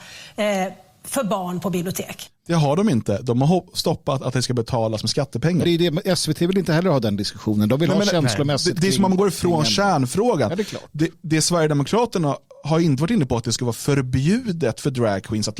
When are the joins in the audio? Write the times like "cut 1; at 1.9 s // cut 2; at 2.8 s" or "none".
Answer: cut 1; at 5.6 s